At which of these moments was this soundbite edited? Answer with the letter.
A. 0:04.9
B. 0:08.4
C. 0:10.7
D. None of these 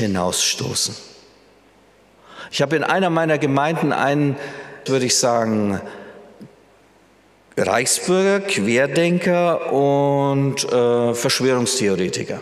A